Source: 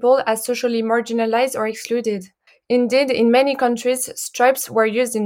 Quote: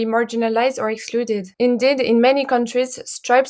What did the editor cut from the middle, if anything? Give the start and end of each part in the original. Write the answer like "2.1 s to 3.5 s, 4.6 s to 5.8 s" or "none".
2.3 s to 2.6 s